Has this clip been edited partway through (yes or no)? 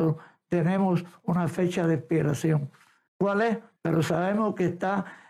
yes